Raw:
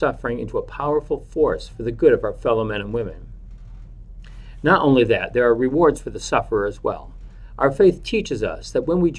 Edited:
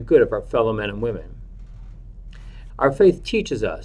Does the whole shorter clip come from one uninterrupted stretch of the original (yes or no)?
no